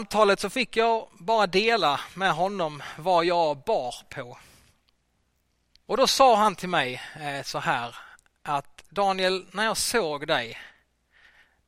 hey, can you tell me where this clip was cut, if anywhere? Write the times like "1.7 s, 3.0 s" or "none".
none